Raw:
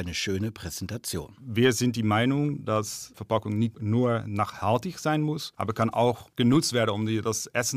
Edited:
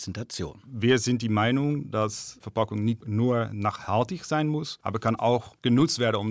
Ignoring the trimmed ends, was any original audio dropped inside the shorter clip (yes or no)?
no